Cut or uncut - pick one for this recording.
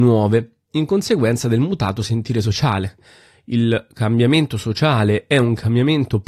uncut